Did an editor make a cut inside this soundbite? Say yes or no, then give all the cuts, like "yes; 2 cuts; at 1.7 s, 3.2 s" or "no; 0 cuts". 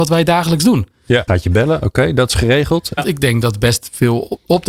yes; 2 cuts; at 1.3 s, 3.0 s